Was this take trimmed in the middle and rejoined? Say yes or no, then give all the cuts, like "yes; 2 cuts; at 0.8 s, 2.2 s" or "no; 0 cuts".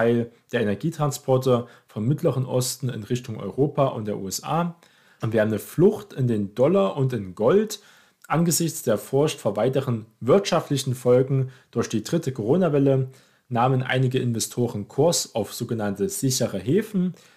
yes; 1 cut; at 5.2 s